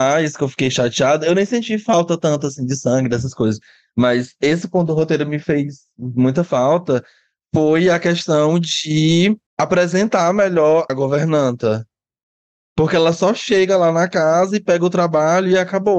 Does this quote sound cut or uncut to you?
cut